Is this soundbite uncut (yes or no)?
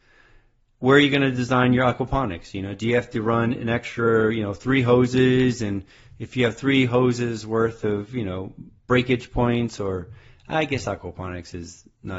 yes